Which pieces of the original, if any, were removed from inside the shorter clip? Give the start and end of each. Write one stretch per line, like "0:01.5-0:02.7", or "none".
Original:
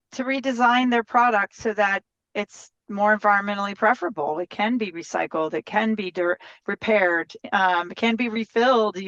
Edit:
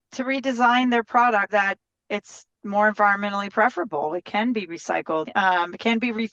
0:01.5-0:01.7
0:05.5-0:07.4